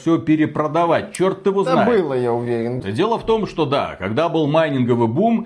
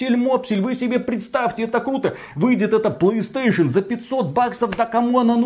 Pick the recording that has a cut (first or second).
first